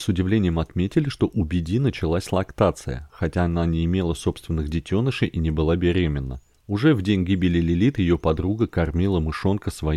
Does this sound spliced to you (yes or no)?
no